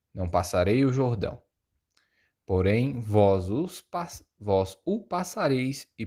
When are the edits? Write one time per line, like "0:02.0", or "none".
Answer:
none